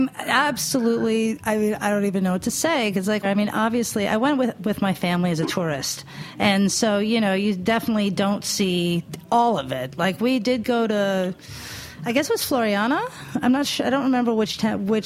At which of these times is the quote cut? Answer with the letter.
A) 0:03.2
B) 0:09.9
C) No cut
A